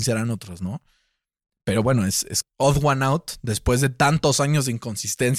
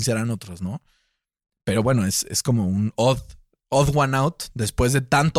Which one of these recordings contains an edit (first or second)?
first